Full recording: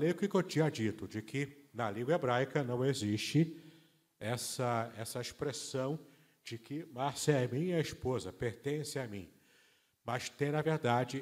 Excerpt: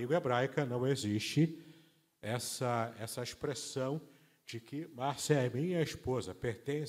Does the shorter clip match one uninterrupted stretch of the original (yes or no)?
yes